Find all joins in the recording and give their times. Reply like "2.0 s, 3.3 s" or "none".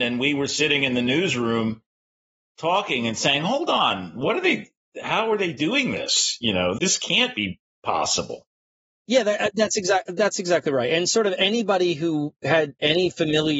6.8 s